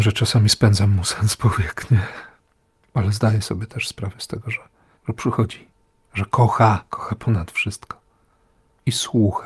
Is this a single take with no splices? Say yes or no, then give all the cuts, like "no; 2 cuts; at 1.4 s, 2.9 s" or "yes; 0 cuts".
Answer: no; 2 cuts; at 4.9 s, 6.9 s